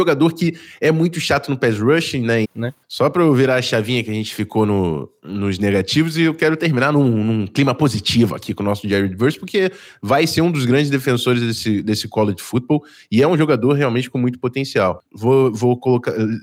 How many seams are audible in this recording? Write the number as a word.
two